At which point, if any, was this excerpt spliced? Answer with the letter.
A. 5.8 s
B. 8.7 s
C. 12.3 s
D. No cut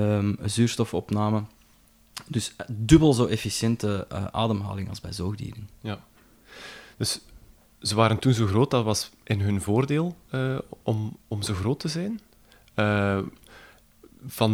D